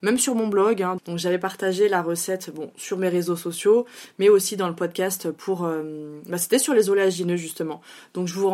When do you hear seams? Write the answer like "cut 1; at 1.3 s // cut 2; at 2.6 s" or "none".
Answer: cut 1; at 1.0 s